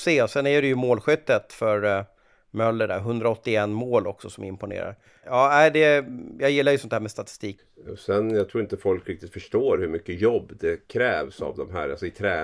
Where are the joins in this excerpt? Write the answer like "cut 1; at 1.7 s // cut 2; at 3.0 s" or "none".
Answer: cut 1; at 5.2 s // cut 2; at 7.6 s